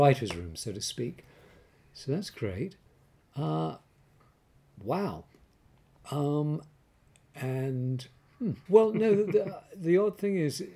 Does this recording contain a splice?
yes; 1 cut; at 8.7 s

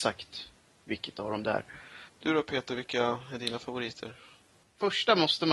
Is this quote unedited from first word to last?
no; 1 cut; at 2.1 s

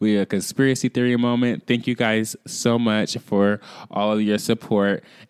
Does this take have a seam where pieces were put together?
no; 0 cuts

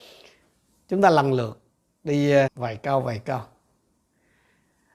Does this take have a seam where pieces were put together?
yes; 1 cut; at 2.5 s

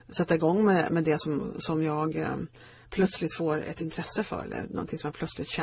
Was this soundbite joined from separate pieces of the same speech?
no; 0 cuts

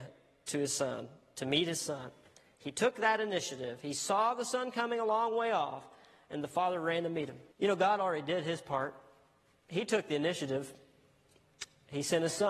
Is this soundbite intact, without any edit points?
no; 1 cut; at 7.5 s

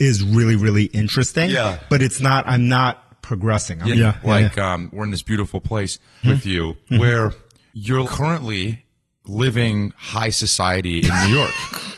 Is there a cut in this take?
yes; 3 cuts; at 3.9 s, 6.2 s, 8.0 s

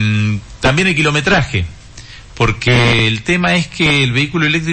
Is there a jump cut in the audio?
no; 0 cuts

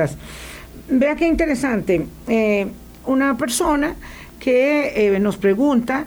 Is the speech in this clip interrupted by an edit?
yes; 1 cut; at 3.0 s

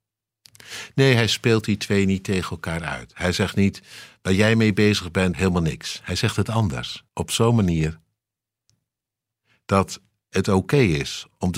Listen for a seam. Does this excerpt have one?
yes; 2 cuts; at 5.3 s, 7.1 s

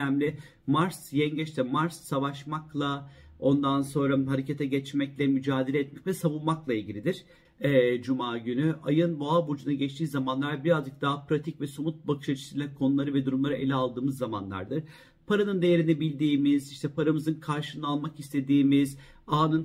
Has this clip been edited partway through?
yes; 1 cut; at 7.5 s

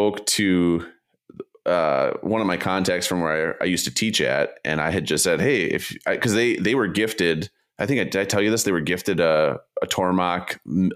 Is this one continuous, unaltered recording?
yes; 0 cuts

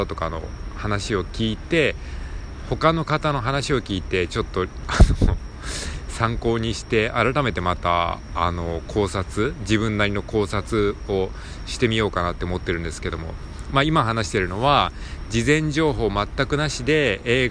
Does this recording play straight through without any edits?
yes; 0 cuts

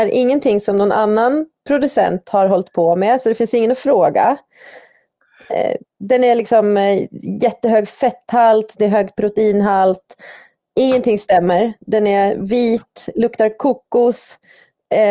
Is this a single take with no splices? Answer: yes; 0 cuts

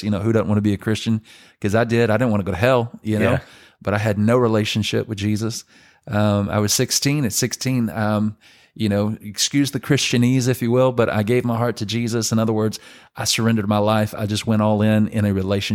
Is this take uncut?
yes; 0 cuts

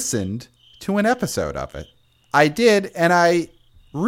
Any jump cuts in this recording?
yes; 1 cut; at 2.2 s

